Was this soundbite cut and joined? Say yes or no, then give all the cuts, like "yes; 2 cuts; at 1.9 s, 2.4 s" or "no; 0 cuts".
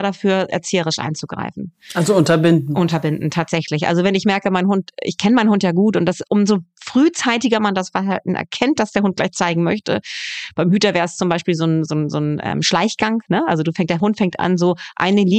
no; 0 cuts